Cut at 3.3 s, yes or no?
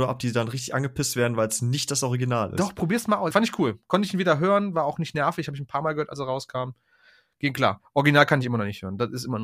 yes